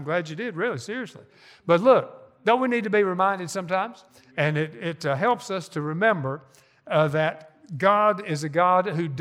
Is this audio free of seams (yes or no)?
yes